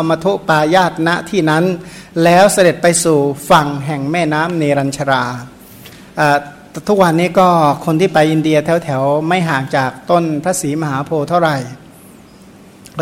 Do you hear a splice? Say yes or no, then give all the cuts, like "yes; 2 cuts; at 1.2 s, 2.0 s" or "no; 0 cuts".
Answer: no; 0 cuts